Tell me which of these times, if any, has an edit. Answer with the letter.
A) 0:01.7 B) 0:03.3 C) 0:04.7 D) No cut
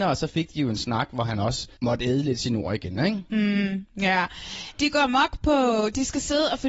A